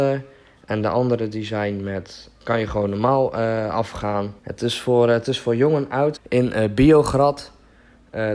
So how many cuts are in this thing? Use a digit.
2